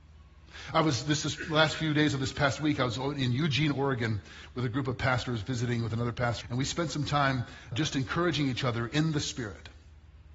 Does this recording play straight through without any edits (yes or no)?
no